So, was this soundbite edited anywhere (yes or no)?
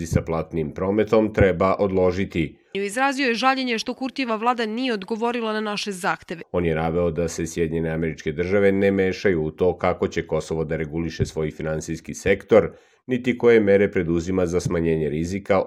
yes